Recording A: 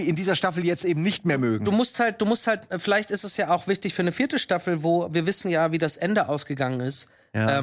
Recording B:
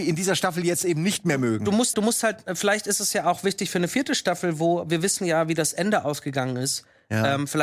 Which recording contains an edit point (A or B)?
B